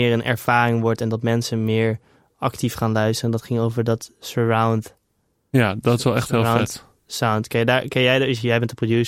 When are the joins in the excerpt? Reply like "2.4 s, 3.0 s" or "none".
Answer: none